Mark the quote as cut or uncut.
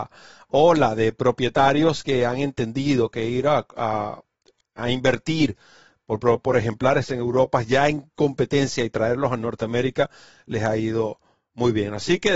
uncut